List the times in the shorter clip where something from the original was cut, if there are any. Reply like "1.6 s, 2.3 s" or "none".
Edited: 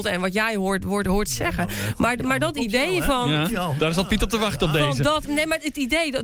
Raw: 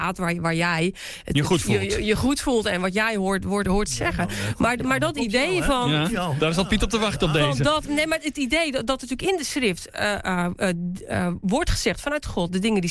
none

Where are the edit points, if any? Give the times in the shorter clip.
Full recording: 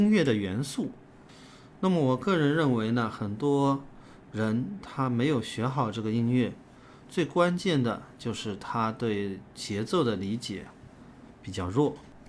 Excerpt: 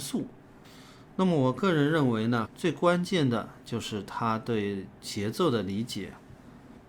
2.4 s

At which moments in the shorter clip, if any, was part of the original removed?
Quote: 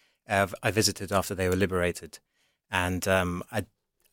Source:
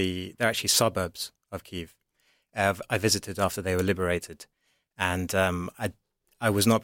none

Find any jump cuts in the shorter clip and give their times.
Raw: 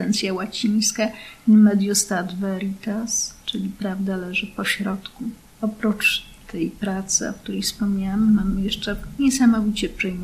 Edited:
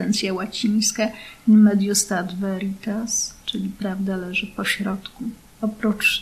none

